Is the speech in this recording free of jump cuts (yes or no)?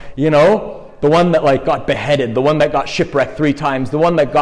yes